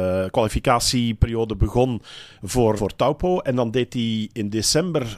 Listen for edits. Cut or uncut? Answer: cut